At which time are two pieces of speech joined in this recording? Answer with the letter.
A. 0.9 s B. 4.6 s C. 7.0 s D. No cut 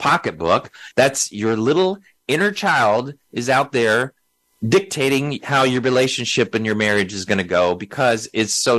A